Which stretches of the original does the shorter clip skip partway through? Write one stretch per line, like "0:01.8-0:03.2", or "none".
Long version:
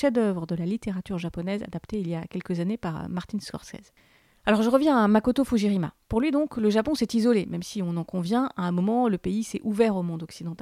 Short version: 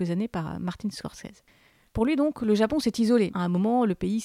0:04.4-0:06.0
0:07.4-0:08.5

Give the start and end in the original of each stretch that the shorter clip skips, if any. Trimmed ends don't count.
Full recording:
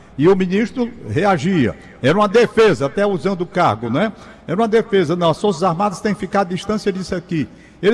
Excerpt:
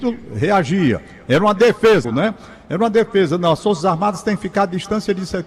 0:02.8-0:03.8

